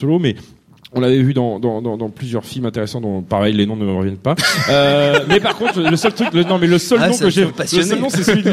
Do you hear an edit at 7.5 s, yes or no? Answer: yes